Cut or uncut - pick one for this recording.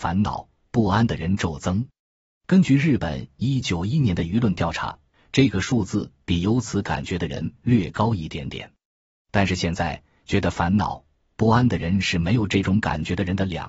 cut